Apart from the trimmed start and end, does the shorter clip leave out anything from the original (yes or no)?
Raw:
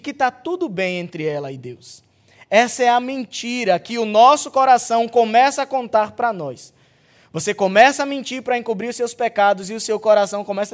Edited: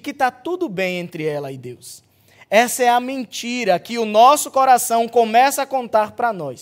no